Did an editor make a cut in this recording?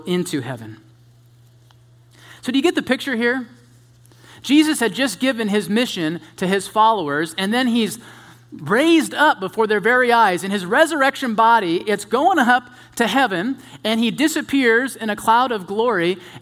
no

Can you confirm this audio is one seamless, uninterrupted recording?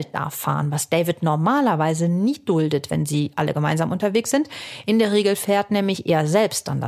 yes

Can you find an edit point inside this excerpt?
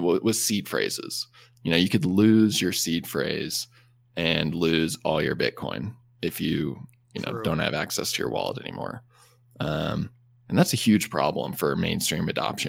no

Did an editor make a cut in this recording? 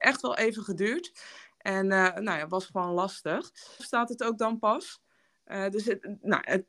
yes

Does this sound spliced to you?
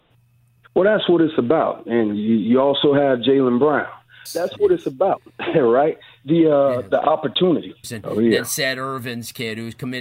yes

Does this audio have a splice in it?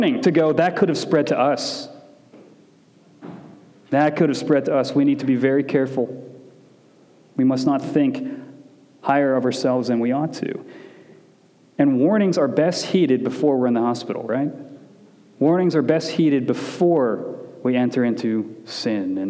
no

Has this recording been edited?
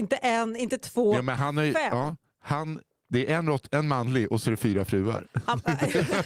no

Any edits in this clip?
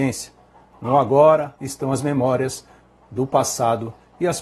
yes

